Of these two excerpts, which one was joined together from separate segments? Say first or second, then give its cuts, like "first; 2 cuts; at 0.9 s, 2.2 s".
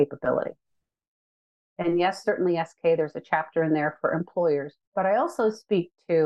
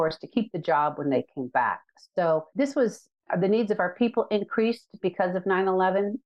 first; 2 cuts; at 1.7 s, 4.8 s